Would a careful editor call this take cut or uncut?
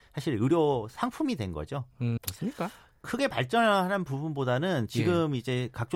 cut